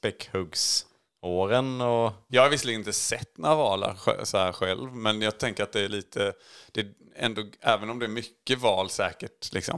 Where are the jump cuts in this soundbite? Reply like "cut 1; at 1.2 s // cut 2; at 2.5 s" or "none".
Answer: cut 1; at 2.3 s